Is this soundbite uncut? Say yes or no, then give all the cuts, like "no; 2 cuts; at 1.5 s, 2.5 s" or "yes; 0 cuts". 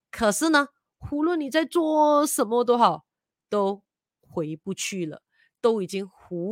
yes; 0 cuts